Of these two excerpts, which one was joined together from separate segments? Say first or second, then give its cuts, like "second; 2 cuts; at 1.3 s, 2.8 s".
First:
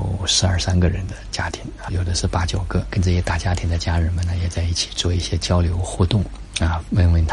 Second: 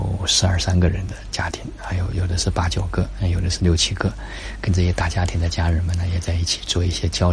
first; 2 cuts; at 1.9 s, 2.9 s